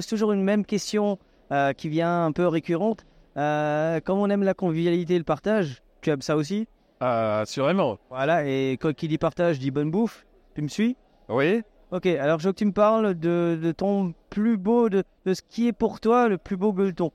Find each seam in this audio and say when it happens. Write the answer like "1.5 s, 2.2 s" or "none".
none

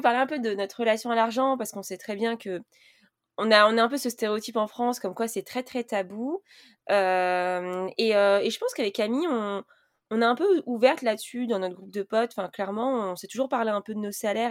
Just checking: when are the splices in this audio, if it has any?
none

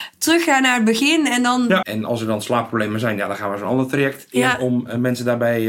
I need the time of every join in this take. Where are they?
1.8 s

